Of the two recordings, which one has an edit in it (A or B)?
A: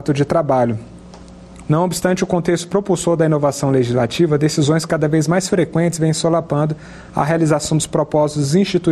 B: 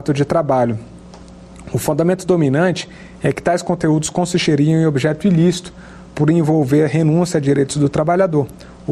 A